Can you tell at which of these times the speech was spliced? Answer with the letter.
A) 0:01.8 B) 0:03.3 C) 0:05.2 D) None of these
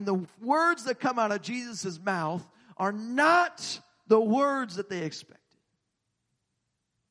D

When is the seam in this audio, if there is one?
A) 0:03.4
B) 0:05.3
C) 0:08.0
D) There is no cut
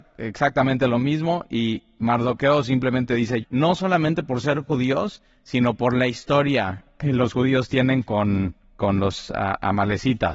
A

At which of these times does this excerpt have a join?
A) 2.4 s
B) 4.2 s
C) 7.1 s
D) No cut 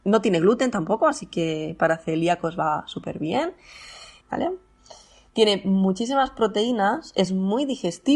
B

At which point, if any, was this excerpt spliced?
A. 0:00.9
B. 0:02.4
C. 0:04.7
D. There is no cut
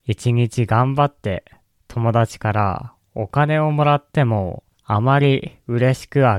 C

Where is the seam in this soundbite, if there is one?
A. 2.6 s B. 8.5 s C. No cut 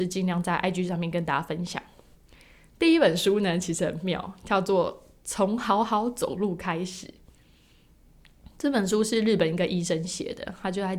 C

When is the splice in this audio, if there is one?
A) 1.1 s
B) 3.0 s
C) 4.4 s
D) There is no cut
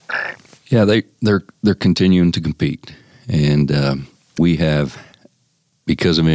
C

